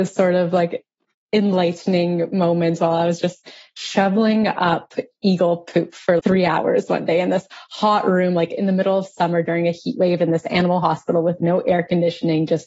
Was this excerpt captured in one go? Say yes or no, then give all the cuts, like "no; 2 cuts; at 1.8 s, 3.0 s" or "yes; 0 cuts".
no; 2 cuts; at 1.1 s, 6.2 s